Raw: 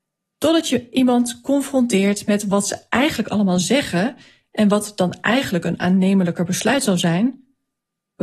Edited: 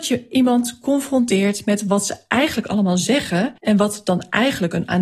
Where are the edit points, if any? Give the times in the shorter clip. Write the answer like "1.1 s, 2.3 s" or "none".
3.6 s

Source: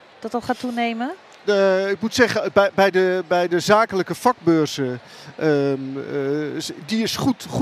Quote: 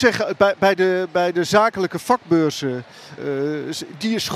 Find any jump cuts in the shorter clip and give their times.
3.2 s

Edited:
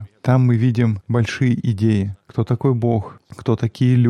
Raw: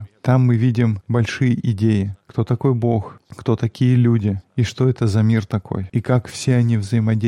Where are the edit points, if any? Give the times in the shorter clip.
none

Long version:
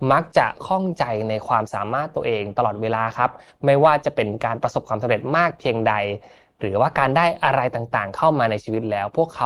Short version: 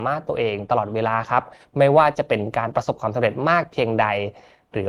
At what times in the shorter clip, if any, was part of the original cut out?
none

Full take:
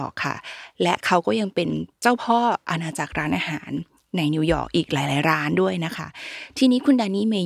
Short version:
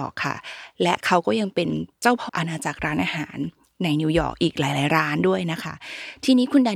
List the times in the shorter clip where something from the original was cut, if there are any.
2.3 s

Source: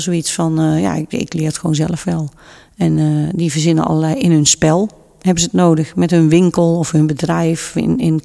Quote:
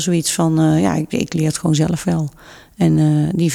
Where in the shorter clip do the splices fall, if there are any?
none

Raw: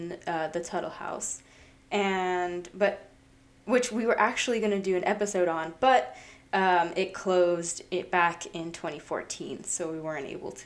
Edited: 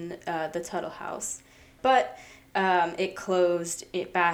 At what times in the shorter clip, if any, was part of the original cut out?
1.8 s

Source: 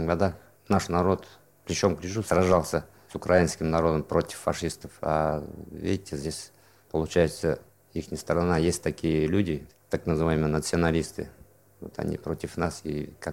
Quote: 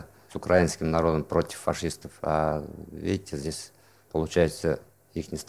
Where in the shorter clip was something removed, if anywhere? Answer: none

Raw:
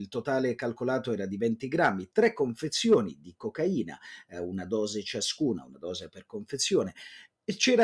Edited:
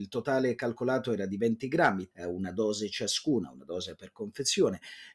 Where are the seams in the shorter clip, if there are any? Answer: 2.1 s

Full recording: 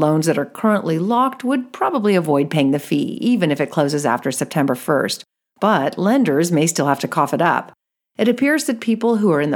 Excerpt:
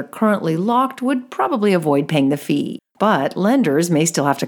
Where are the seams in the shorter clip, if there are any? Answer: 2.8 s

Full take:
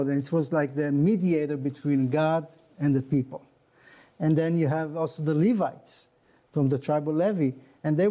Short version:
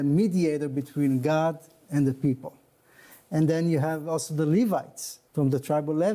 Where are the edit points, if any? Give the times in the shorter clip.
5.2 s

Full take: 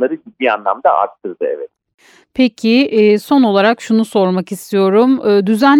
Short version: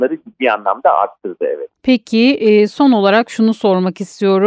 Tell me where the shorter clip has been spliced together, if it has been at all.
1.8 s

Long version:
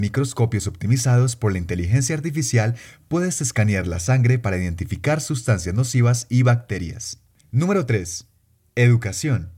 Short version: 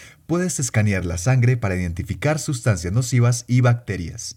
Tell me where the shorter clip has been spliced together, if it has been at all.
none

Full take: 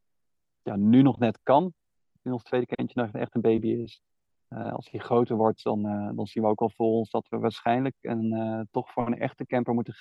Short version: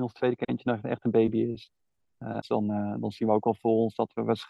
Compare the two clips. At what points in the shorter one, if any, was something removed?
2.4 s

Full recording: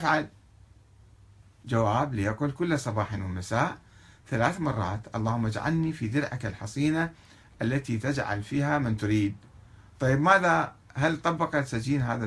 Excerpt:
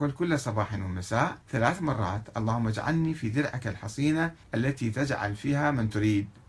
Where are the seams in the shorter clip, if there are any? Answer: 1.4 s, 4.4 s

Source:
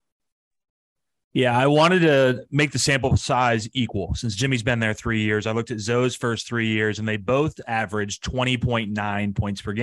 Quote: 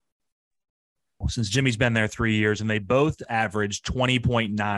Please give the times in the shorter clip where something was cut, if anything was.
1.2 s, 2.6 s

